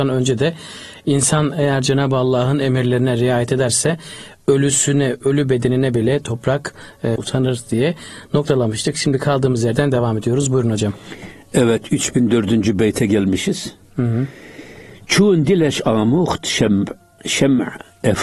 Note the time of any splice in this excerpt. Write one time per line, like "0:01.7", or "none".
0:07.2